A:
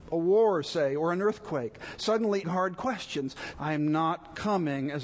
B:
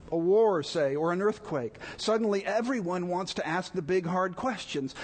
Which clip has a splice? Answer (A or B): A